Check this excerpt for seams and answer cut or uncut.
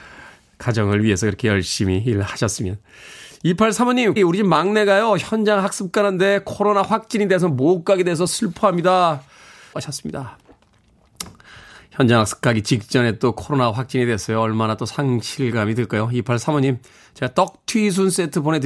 cut